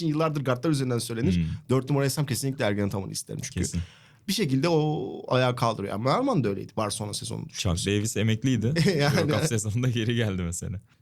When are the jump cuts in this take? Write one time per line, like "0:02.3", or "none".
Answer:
none